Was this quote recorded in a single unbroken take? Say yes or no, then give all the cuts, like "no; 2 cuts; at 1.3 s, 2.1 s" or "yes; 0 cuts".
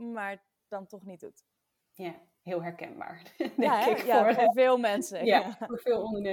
yes; 0 cuts